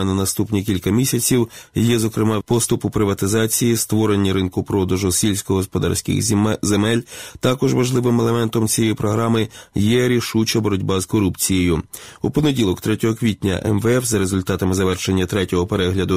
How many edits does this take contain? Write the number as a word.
one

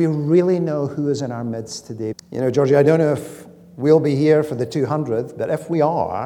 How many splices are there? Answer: one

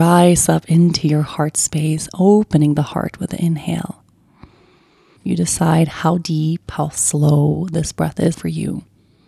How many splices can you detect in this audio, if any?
two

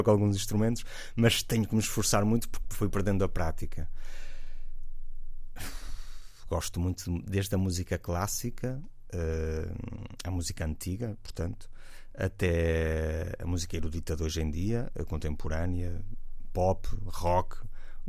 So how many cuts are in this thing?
zero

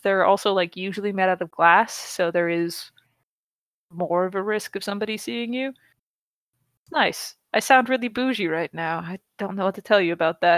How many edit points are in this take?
zero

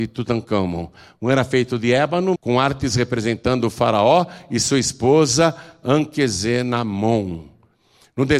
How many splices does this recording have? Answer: one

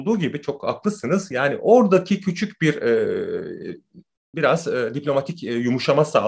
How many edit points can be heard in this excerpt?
one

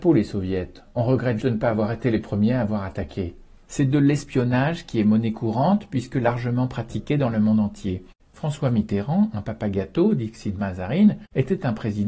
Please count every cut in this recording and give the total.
three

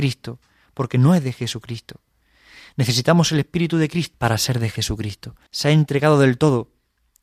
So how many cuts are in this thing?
two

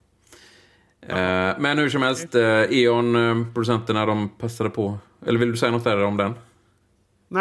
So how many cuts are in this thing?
zero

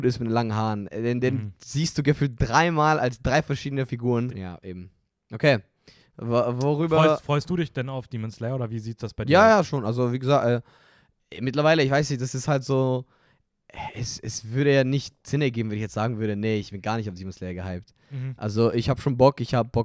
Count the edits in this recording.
two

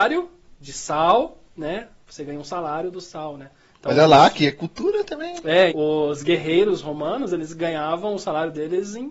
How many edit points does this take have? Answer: one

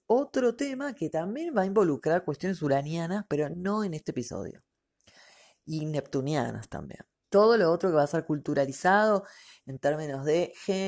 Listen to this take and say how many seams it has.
one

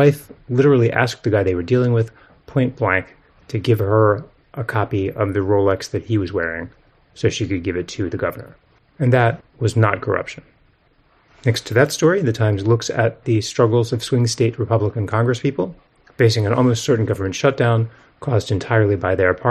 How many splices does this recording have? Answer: one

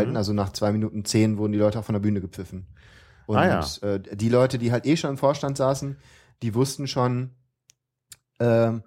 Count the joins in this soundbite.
zero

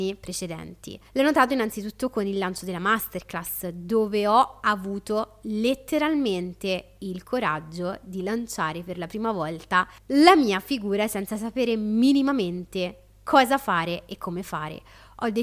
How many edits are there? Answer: one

